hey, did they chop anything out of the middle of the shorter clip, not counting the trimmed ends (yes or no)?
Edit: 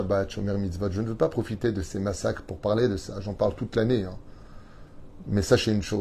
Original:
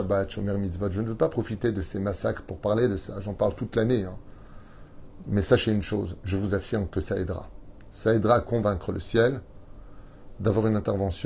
no